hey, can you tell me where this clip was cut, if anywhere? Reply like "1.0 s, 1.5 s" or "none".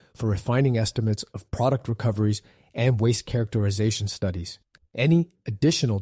4.8 s